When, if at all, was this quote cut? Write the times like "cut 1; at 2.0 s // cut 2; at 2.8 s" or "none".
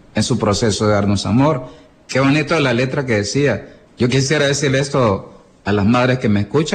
cut 1; at 3.9 s

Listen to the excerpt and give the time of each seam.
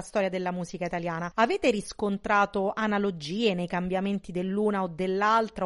none

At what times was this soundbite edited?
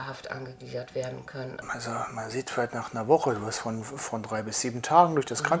cut 1; at 1.6 s

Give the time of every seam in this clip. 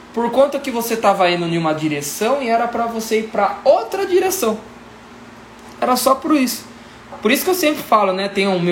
none

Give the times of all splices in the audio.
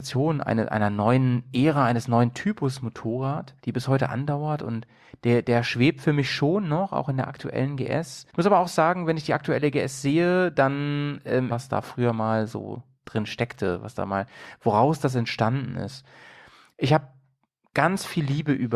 cut 1; at 3.6 s // cut 2; at 8.3 s // cut 3; at 11.5 s

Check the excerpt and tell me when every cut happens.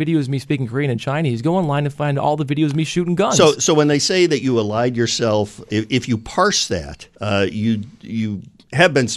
cut 1; at 7.2 s

